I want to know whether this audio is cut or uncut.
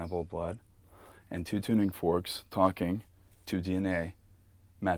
uncut